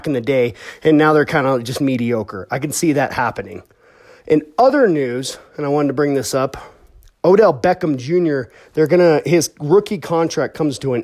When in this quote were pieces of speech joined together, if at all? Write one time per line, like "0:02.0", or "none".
none